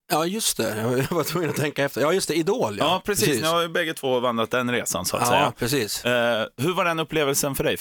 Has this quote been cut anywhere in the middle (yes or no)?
no